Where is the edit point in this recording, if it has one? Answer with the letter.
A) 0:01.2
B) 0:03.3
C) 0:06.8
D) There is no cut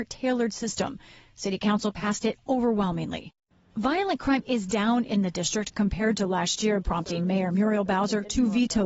C